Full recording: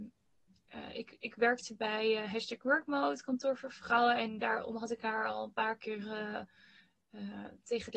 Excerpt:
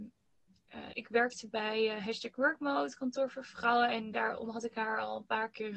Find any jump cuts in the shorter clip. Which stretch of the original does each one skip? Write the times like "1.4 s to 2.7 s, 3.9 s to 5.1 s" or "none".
0.9 s to 1.2 s